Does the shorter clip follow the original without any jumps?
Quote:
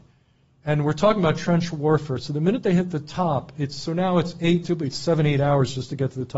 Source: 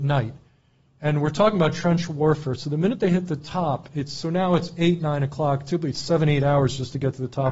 no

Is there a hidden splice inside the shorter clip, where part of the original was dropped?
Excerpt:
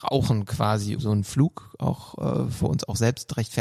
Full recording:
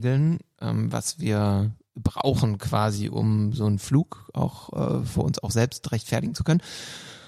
yes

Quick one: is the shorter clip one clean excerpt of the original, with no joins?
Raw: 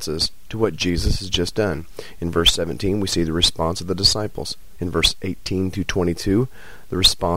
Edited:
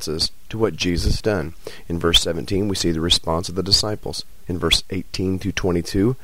no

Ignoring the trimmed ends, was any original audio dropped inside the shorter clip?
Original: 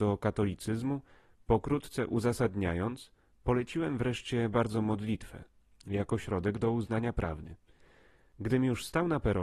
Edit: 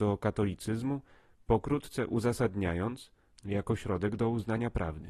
yes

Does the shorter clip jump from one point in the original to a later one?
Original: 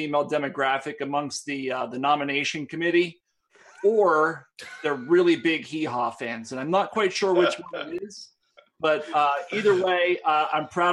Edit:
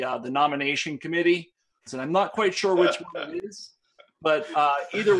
yes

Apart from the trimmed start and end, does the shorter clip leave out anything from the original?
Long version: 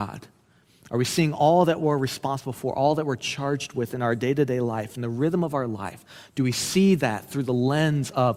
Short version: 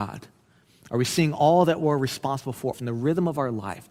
yes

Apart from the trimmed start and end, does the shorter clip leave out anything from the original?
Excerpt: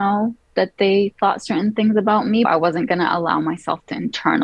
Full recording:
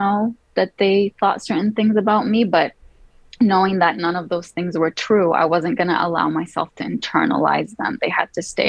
yes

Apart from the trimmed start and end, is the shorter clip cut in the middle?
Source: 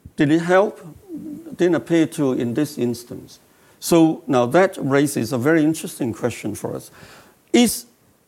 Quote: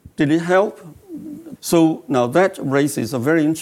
yes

